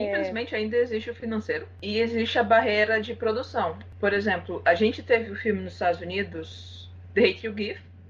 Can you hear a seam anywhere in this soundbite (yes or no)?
no